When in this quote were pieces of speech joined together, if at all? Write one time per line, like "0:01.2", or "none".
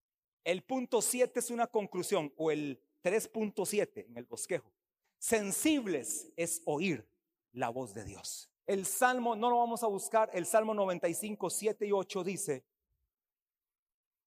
0:08.6